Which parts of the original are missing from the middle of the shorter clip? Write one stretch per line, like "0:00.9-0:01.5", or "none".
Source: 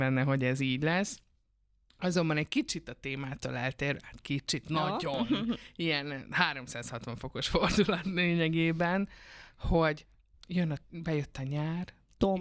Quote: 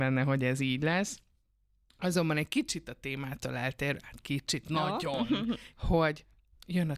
0:05.7-0:09.5